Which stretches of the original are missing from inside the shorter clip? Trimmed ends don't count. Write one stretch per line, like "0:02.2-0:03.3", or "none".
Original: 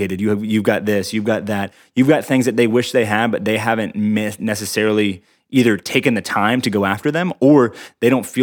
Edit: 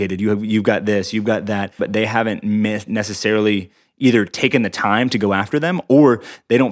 0:01.8-0:03.3